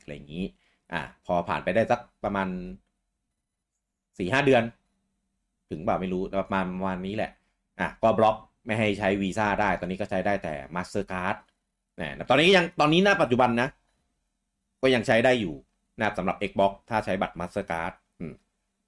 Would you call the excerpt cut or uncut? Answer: uncut